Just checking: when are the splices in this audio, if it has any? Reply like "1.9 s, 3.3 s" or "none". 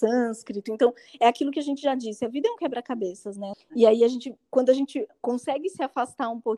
3.5 s